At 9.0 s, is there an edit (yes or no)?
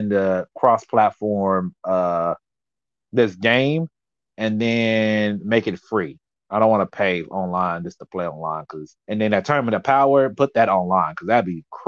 yes